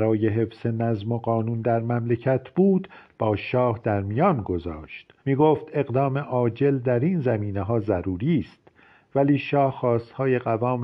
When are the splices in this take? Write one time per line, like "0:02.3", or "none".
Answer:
0:05.2